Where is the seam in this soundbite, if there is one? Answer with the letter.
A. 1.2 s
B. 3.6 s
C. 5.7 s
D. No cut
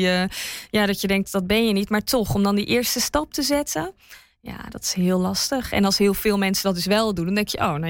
A